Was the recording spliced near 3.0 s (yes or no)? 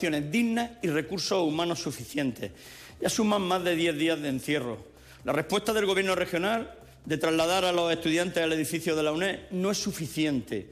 no